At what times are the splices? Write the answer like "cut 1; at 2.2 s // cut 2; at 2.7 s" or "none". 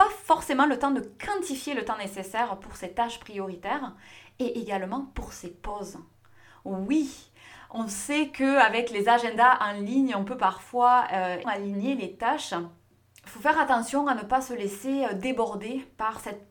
cut 1; at 11.4 s